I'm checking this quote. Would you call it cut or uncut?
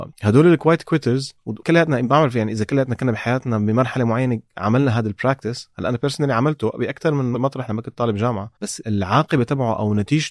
cut